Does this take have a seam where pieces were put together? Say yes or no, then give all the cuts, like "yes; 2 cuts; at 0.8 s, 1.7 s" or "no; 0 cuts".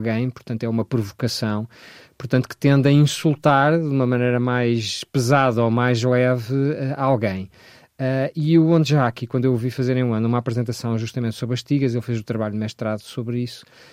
no; 0 cuts